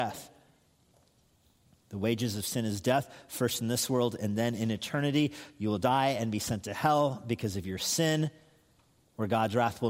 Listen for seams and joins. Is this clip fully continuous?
yes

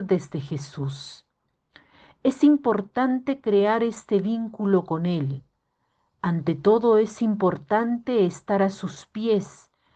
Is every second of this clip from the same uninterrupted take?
yes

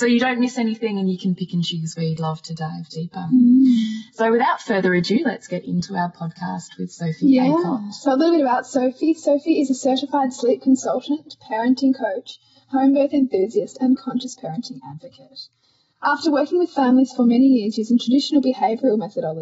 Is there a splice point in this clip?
no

